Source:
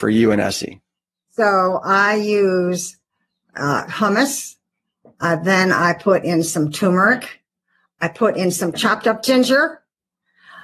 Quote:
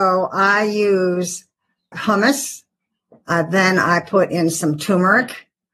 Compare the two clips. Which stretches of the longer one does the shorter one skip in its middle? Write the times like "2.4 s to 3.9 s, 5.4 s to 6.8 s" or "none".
3.4 s to 3.9 s